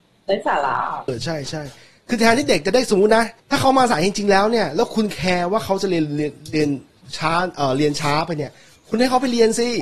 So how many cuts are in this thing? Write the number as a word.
two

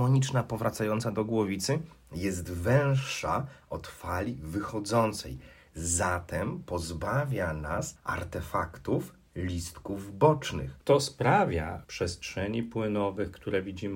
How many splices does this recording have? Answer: two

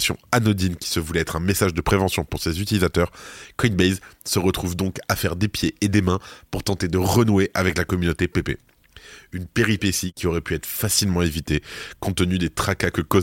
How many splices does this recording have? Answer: zero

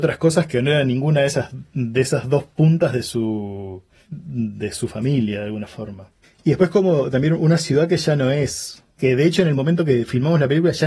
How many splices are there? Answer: one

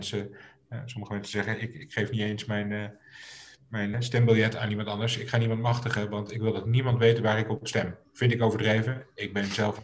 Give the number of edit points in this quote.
one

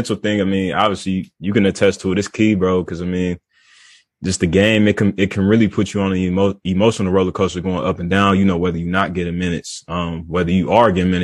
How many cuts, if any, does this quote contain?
zero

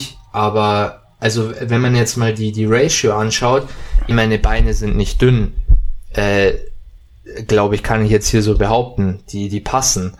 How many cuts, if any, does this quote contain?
one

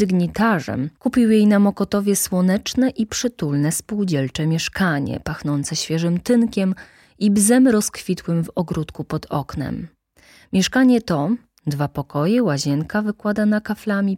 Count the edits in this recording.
zero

